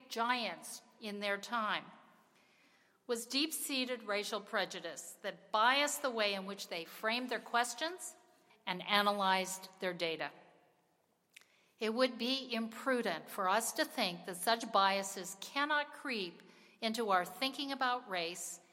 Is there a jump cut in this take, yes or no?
yes